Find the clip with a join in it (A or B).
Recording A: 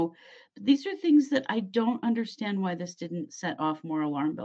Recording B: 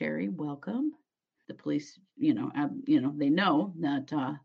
B